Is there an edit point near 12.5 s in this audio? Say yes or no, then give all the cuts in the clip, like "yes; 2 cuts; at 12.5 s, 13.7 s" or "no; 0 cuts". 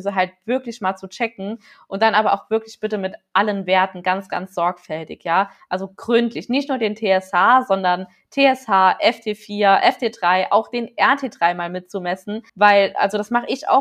yes; 1 cut; at 12.5 s